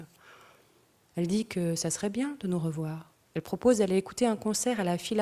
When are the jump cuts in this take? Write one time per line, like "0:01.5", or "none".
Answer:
0:01.1
0:03.2